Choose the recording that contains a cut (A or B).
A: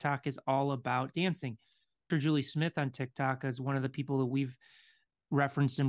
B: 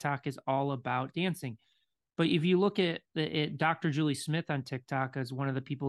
A